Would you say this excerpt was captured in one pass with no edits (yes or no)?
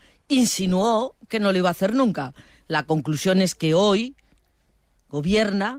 yes